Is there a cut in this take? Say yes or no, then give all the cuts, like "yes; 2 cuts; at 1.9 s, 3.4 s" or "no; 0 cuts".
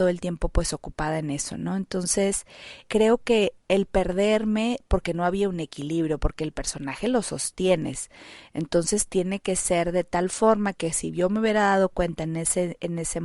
yes; 1 cut; at 2.8 s